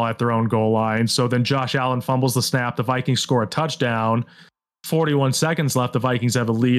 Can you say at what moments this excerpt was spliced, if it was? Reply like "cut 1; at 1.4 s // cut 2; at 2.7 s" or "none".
none